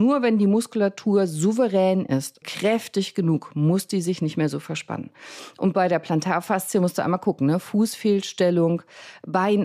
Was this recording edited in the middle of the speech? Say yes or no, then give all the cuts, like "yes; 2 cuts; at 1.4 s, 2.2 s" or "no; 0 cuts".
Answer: yes; 1 cut; at 2.4 s